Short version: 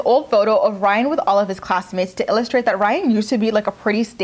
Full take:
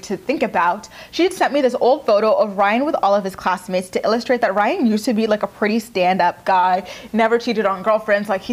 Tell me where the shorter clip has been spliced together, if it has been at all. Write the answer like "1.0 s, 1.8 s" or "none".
none